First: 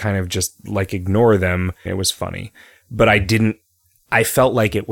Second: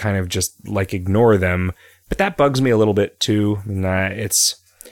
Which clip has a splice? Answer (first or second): first